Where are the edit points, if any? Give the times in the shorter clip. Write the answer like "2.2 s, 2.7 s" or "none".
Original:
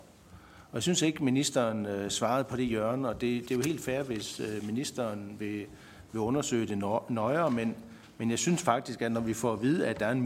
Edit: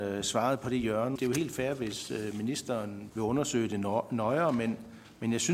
1.2 s, 3.1 s